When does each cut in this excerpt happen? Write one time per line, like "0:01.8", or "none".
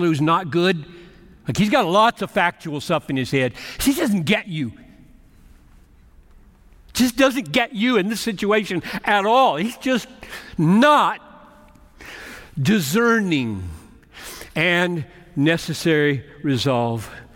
none